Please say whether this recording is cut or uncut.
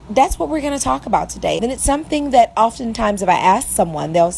cut